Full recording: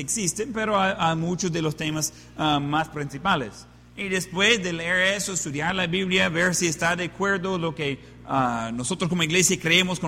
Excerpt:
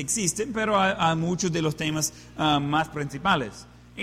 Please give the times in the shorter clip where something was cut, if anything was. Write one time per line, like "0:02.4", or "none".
none